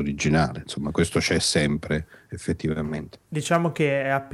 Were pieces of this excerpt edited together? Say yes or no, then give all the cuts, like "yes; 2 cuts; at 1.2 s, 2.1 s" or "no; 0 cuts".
no; 0 cuts